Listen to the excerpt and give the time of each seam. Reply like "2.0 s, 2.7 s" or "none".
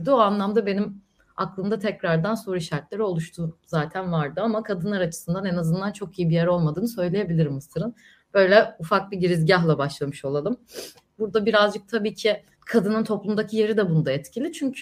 11.2 s, 12.5 s